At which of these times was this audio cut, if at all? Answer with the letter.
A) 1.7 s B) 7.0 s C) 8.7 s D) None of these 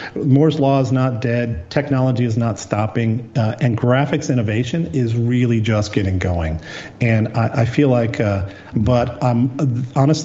C